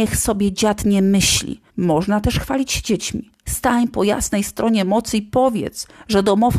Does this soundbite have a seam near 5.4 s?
no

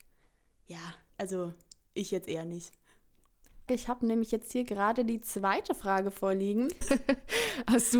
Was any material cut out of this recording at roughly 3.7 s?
yes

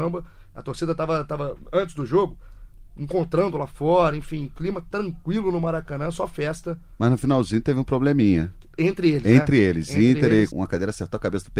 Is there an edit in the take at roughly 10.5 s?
yes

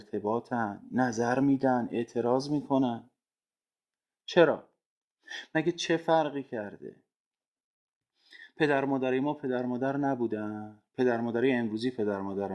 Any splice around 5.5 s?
no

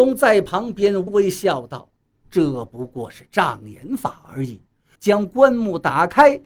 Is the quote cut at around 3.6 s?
no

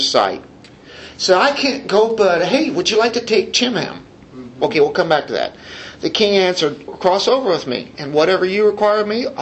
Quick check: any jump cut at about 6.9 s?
yes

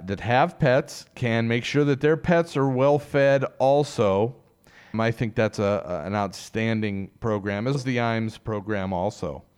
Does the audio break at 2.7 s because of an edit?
no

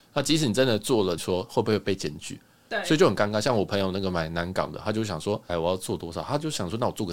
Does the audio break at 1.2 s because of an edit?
yes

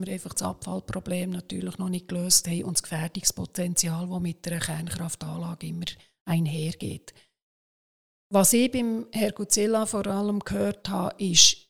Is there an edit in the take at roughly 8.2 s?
no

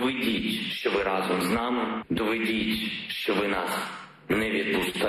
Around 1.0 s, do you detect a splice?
no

